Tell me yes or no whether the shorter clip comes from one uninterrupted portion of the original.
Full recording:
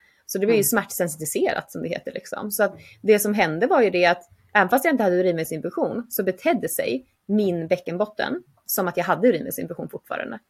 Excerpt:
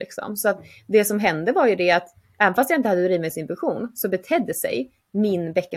yes